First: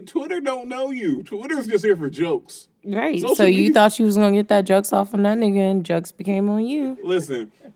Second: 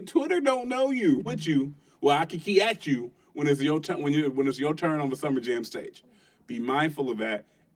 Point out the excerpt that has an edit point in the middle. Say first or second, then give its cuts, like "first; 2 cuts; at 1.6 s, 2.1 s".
second; 1 cut; at 1.3 s